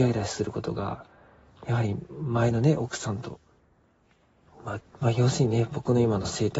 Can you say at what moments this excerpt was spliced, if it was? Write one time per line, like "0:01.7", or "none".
0:04.8

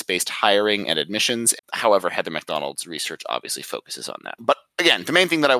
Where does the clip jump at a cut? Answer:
0:01.6
0:04.4

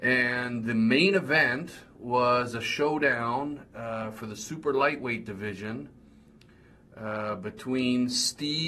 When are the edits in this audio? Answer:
none

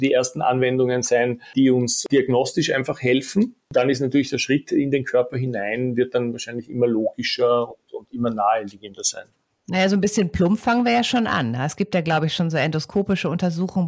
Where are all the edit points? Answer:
none

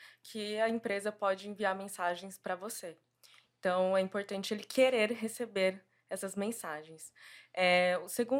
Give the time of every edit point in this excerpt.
none

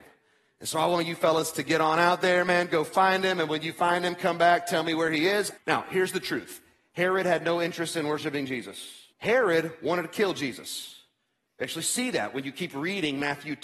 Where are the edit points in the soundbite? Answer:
0:05.6
0:09.1

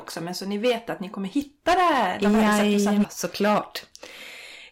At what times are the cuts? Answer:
0:03.0

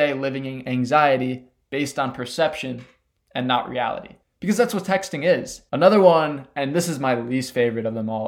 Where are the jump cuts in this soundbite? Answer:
0:05.7

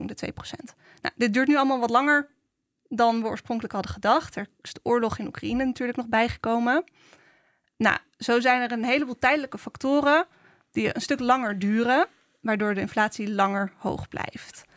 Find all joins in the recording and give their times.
none

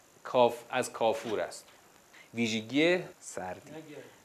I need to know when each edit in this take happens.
0:03.1

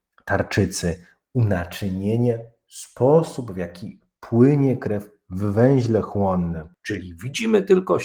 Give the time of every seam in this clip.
0:06.8

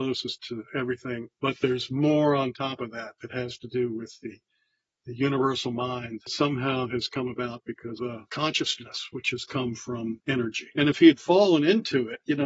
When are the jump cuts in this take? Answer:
0:10.7

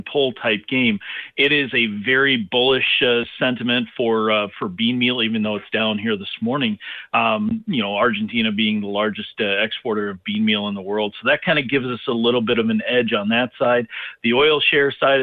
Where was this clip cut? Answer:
none

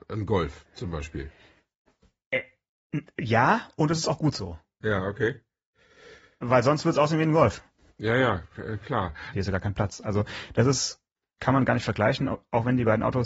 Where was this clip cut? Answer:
0:09.3

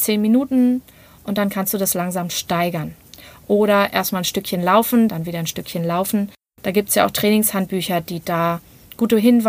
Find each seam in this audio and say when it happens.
0:05.1

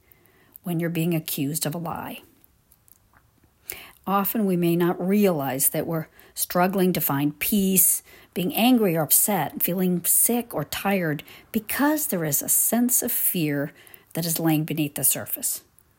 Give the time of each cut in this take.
0:03.9

